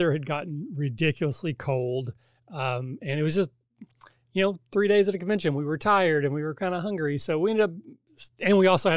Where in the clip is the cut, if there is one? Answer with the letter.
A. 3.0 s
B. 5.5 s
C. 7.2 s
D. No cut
D